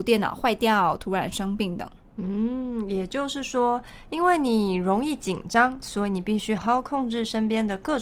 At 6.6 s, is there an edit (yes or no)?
yes